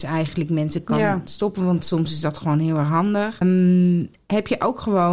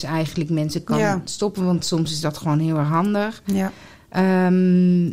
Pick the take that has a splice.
first; 1 cut; at 3.4 s

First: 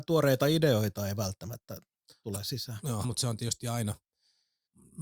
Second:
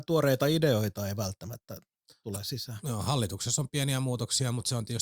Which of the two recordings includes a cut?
first; 1 cut; at 3.0 s

